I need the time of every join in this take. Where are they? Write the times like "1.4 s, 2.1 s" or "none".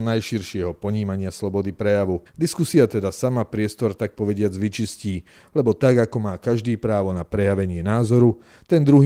2.3 s